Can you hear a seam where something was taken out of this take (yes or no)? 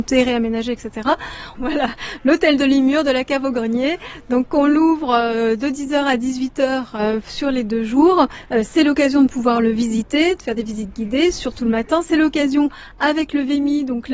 yes